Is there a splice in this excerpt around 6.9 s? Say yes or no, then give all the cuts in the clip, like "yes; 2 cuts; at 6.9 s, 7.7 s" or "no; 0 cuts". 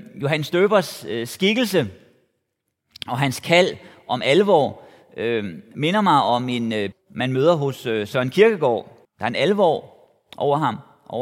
yes; 2 cuts; at 6.9 s, 9.0 s